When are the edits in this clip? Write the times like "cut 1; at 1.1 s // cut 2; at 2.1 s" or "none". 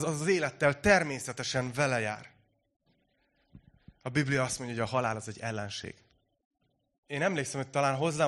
cut 1; at 7.0 s